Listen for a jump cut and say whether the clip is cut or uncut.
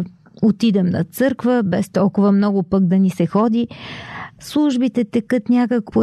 cut